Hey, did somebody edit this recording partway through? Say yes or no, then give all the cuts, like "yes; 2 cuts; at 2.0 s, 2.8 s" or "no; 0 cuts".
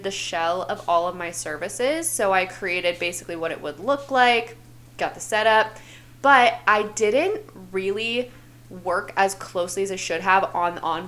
no; 0 cuts